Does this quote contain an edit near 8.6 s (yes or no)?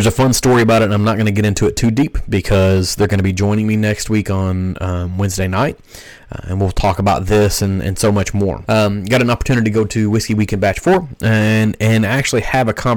yes